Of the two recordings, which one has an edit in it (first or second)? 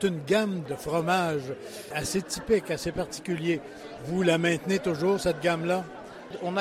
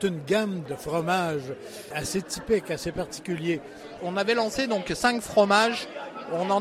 second